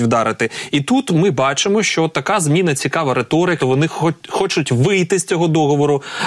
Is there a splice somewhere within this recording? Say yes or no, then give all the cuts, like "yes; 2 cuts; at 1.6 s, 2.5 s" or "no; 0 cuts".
yes; 1 cut; at 3.6 s